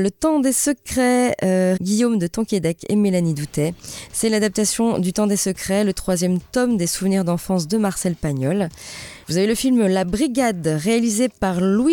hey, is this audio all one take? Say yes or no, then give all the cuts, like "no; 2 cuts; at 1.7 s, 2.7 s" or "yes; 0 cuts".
no; 2 cuts; at 1.8 s, 9.2 s